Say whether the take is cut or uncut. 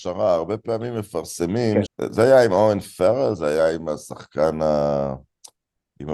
cut